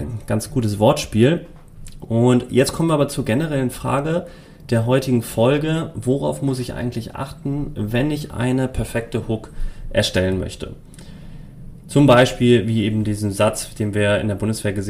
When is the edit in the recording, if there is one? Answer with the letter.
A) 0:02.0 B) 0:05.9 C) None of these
C